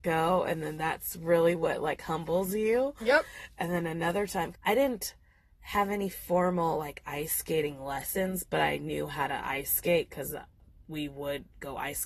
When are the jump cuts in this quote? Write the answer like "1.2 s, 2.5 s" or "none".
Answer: 4.5 s

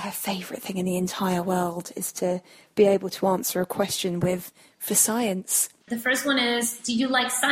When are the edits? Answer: 5.9 s

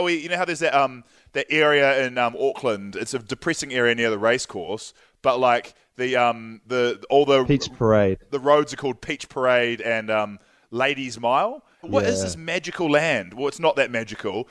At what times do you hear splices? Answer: 11.8 s

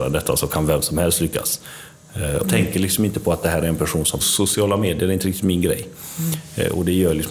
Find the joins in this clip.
2.4 s, 4.2 s

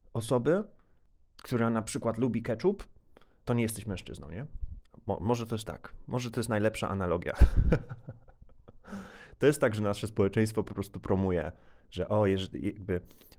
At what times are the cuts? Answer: 3.4 s

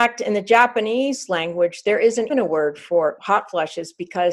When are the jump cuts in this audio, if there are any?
2.3 s

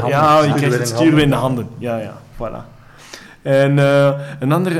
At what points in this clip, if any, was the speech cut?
none

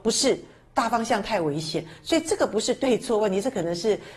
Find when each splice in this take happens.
none

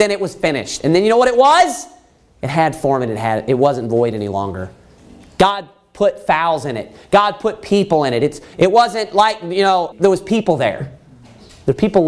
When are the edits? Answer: 8.5 s, 9.9 s

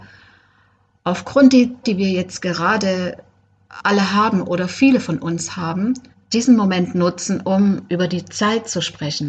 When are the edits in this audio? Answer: 1.8 s, 6.1 s

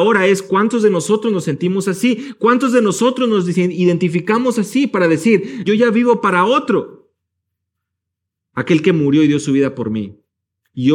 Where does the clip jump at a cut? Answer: 5.6 s

